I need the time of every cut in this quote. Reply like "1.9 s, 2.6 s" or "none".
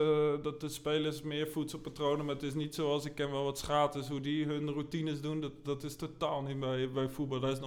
none